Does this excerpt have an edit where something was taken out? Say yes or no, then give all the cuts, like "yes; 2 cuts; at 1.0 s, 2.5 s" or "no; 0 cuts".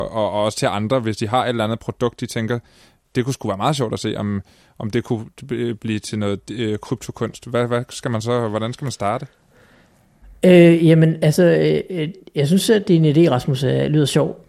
no; 0 cuts